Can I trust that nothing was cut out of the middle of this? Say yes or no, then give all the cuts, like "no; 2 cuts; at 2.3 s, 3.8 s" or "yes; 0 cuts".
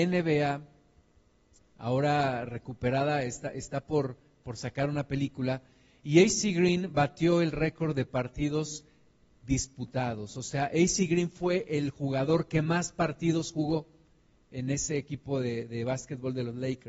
yes; 0 cuts